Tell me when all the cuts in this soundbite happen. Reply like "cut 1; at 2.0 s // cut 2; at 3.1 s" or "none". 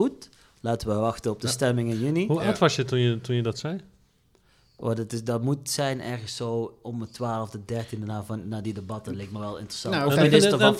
none